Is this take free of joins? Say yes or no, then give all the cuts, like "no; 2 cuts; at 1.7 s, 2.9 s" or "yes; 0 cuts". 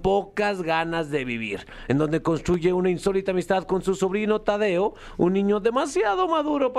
yes; 0 cuts